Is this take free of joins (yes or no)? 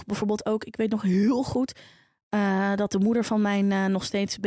yes